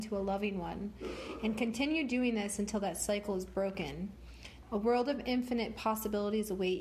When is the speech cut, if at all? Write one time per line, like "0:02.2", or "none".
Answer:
0:04.6